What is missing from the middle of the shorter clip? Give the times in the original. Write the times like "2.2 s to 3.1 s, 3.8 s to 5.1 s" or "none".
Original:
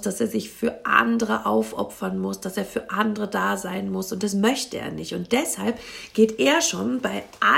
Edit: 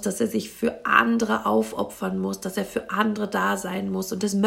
none